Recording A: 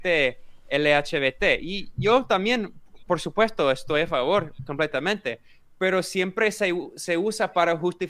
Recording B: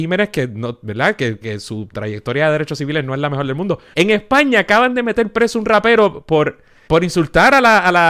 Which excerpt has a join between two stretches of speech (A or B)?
B